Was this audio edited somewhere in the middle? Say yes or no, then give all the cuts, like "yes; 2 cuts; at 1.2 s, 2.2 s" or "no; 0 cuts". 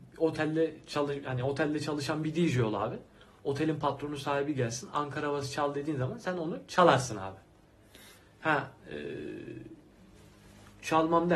no; 0 cuts